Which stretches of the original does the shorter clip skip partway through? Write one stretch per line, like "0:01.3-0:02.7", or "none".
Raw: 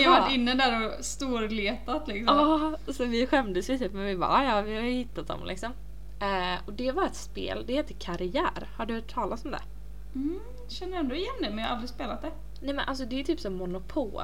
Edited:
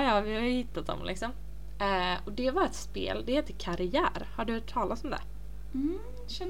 none